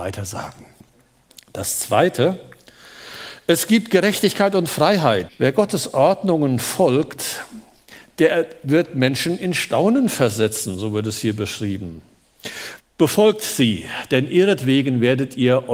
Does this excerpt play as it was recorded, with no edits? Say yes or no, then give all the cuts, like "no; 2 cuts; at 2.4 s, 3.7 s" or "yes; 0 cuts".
no; 2 cuts; at 5.3 s, 12.8 s